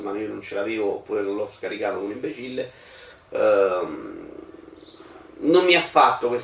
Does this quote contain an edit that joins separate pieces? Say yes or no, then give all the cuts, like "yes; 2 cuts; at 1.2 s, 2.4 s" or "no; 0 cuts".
yes; 1 cut; at 3.1 s